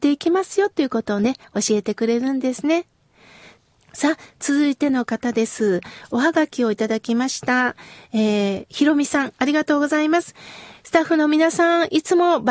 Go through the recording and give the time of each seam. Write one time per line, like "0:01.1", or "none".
none